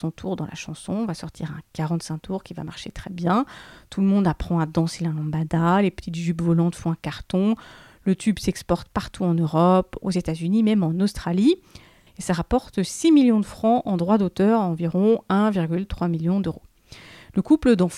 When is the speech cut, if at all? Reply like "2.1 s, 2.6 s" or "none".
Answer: 10.0 s, 12.1 s